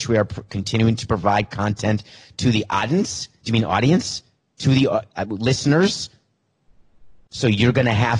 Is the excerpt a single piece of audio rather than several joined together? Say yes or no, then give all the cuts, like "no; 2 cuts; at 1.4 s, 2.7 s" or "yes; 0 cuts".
yes; 0 cuts